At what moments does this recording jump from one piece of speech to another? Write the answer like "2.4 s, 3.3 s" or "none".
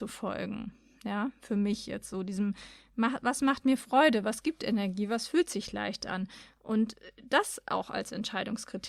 none